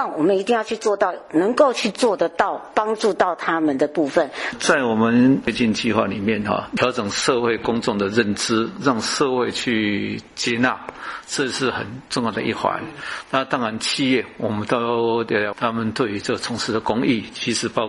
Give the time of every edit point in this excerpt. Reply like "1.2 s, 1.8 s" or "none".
4.5 s, 15.5 s